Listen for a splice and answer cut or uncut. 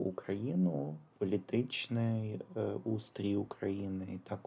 uncut